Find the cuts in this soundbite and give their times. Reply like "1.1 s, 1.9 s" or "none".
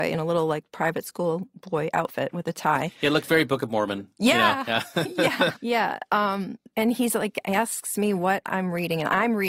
5.5 s, 6.7 s